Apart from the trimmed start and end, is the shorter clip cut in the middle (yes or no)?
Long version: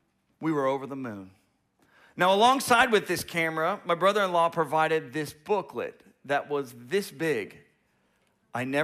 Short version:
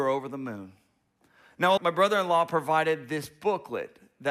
yes